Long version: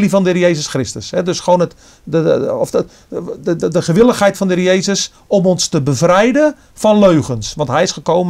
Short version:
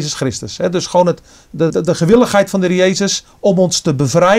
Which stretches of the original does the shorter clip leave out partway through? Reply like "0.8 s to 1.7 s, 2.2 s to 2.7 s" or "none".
2.2 s to 3.6 s